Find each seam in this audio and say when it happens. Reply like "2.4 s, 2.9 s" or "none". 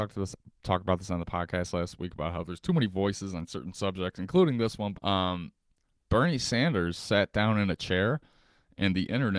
4.9 s